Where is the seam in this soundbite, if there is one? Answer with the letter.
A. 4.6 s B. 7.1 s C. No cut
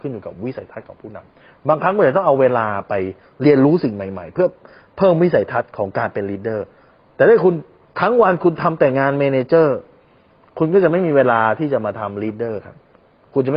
C